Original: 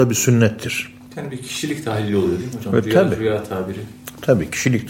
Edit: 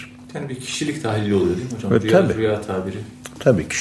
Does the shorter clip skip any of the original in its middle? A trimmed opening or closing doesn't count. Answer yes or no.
no